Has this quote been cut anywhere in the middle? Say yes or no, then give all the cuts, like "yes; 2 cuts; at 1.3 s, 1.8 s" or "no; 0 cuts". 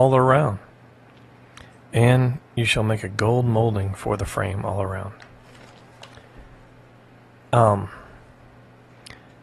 no; 0 cuts